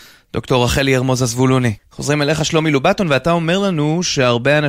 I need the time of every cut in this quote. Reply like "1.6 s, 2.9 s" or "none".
1.8 s